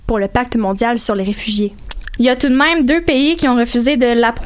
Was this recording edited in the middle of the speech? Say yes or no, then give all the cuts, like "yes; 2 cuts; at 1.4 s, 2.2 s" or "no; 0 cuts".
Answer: yes; 1 cut; at 2.2 s